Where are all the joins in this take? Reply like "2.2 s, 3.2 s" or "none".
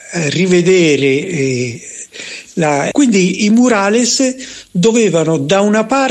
2.9 s